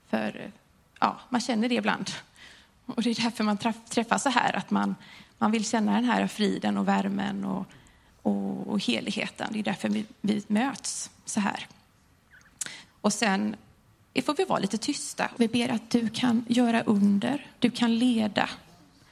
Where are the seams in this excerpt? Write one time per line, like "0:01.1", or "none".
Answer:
0:12.9
0:15.4